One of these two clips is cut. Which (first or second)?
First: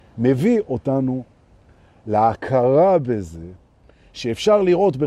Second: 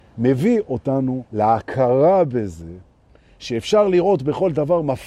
second